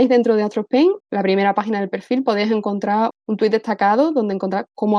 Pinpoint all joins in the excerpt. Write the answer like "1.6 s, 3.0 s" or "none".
1.0 s, 3.1 s